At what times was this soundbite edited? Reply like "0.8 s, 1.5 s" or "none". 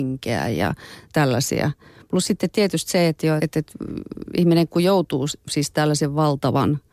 3.4 s